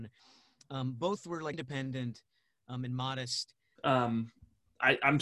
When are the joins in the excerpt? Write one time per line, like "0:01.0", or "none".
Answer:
0:01.5
0:03.8